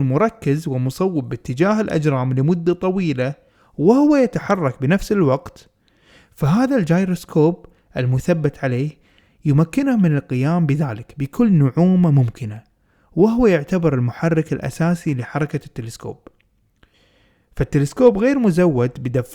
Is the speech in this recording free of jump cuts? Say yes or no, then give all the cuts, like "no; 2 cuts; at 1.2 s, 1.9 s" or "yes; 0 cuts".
yes; 0 cuts